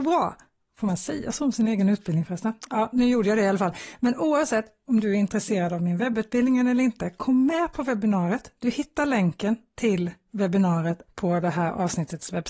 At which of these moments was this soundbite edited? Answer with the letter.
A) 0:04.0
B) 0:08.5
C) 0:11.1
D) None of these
C